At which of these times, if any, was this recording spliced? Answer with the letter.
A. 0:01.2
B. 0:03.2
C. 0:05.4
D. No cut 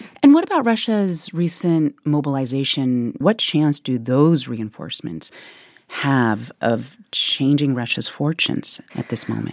B